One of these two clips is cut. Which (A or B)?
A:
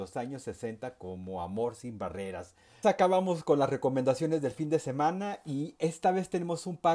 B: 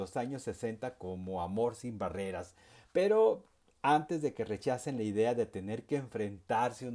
A